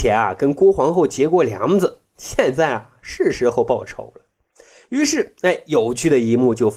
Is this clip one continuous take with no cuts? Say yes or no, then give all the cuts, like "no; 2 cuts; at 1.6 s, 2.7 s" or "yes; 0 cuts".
yes; 0 cuts